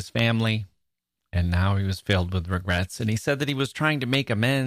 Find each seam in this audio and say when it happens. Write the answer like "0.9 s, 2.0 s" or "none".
none